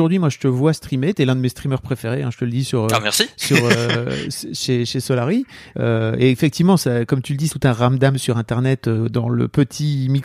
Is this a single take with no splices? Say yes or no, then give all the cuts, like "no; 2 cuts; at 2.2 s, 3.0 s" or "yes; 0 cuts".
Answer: no; 2 cuts; at 5.7 s, 7.5 s